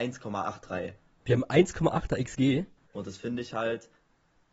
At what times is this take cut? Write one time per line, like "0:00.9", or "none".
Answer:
0:01.2
0:02.9